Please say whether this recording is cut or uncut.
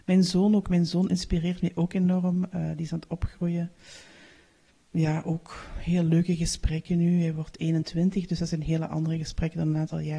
uncut